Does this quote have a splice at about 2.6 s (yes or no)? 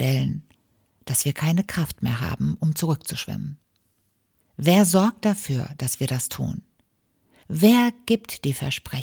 no